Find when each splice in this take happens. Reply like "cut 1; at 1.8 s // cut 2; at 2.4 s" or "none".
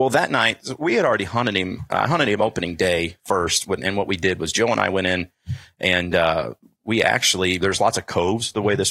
cut 1; at 7.6 s